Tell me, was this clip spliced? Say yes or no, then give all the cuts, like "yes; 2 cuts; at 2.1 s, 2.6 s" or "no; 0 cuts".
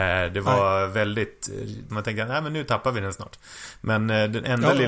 yes; 1 cut; at 1.9 s